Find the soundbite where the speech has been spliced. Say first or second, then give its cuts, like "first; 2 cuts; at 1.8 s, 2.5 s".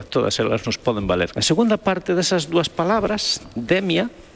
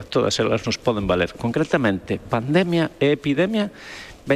first; 1 cut; at 1.3 s